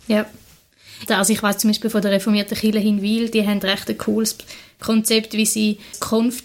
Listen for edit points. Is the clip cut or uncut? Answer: cut